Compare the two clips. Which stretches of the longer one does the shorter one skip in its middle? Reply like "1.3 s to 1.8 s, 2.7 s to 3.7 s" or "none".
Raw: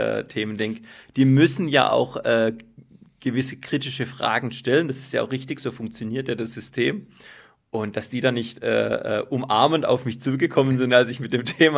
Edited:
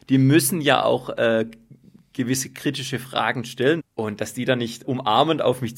4.9 s to 7.6 s, 8.6 s to 9.3 s